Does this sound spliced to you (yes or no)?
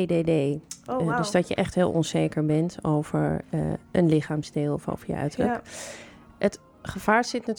no